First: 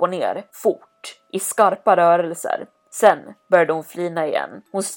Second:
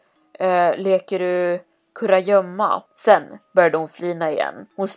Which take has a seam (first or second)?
second